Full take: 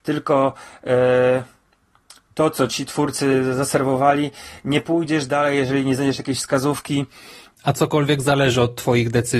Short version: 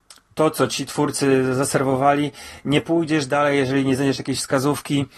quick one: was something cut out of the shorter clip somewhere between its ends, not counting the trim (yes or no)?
no